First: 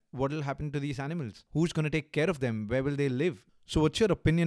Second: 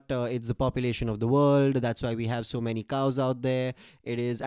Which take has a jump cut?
first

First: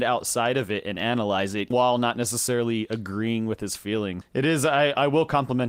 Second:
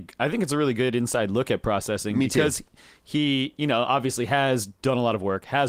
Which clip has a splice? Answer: first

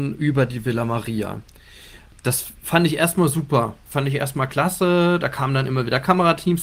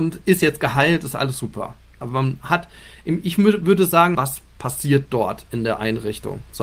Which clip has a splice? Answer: second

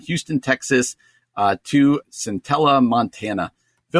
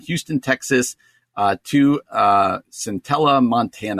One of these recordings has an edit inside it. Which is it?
first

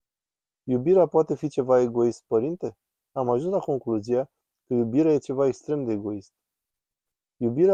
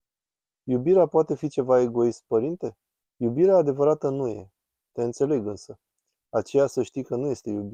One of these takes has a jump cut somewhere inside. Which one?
second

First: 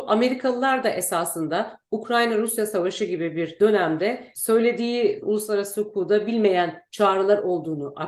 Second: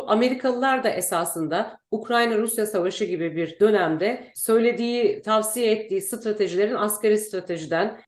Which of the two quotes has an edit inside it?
first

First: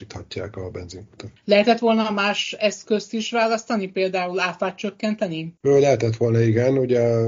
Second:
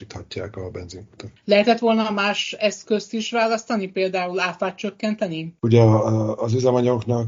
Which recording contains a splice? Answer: second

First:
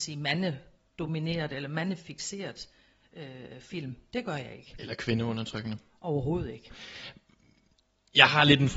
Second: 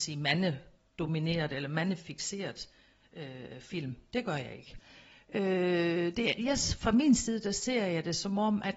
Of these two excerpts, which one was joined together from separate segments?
second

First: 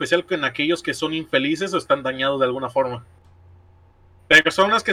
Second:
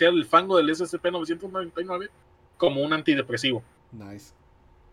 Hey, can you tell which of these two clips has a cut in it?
first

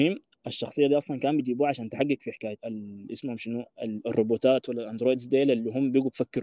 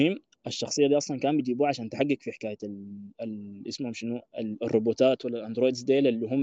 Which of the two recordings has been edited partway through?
first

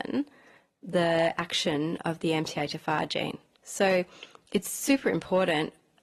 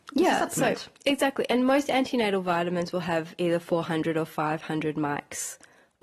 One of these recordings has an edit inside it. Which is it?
first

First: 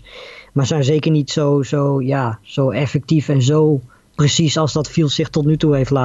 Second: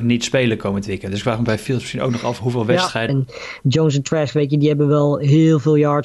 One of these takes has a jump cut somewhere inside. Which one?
second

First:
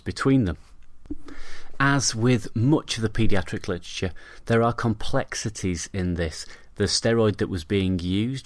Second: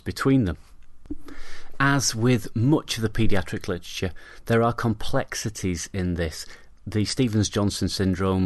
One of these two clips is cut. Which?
first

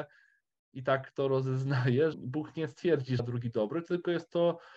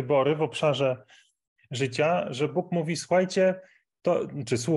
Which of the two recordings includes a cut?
first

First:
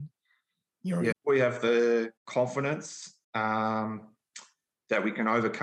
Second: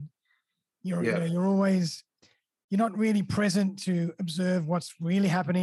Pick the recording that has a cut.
first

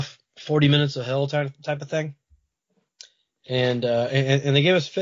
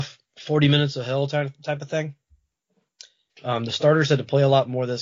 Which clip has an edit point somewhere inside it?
second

